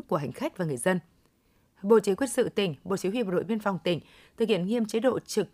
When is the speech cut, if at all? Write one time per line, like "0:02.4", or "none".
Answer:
none